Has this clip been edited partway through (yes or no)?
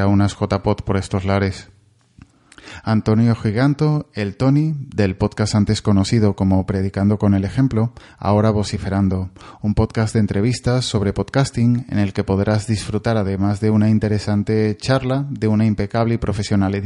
no